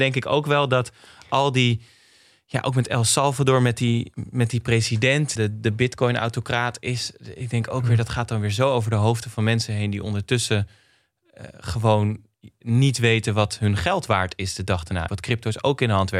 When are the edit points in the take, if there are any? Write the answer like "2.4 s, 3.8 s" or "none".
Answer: 5.4 s, 15.1 s